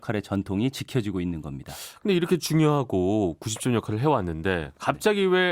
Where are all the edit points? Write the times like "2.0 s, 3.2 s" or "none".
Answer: none